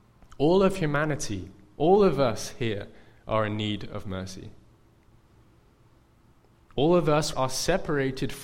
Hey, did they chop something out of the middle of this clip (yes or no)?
yes